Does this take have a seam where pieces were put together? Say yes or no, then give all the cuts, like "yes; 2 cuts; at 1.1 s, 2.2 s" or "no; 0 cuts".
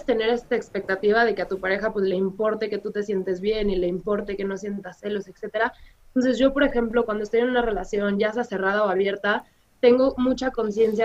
yes; 1 cut; at 5.9 s